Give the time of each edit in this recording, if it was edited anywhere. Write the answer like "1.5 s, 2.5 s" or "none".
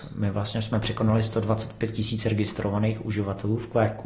none